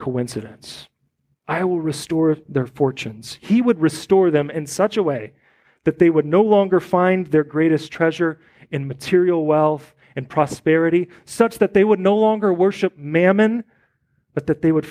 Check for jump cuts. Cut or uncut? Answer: uncut